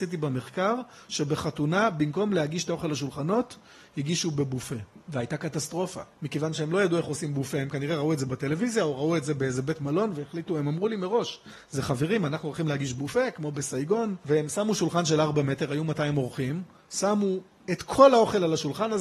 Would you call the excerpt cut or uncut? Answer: uncut